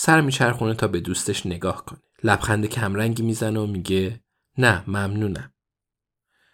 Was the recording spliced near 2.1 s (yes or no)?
yes